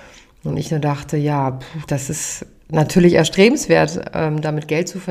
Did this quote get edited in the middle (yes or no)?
no